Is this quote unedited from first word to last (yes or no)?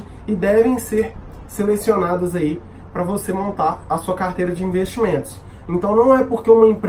yes